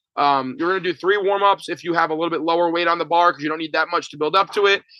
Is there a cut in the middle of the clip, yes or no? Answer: no